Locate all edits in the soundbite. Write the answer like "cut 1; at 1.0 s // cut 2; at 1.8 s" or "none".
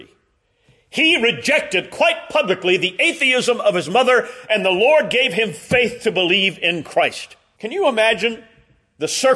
cut 1; at 7.6 s